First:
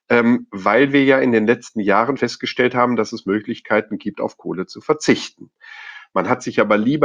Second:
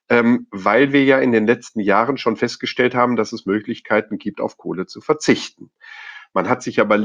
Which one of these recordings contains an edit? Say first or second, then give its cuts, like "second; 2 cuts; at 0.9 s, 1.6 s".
first; 1 cut; at 2.2 s